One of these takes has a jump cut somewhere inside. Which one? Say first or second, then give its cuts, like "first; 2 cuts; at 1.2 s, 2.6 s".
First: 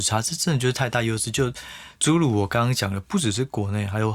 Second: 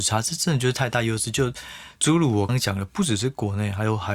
second; 1 cut; at 2.5 s